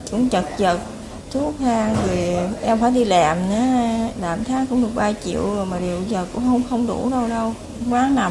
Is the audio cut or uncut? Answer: cut